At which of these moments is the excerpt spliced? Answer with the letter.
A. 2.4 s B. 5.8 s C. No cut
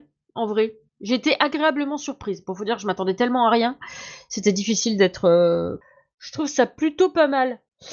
B